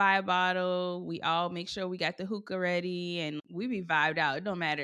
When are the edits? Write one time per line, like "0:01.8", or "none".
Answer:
none